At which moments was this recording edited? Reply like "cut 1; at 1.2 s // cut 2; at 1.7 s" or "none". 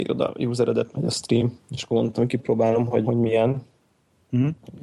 cut 1; at 0.9 s // cut 2; at 3.0 s